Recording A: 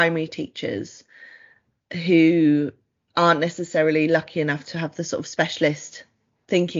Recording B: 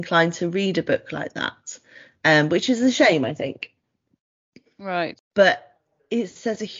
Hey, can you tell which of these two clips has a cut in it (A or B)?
B